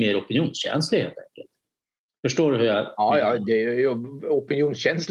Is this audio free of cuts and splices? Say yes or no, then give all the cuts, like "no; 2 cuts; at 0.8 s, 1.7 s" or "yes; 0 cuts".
yes; 0 cuts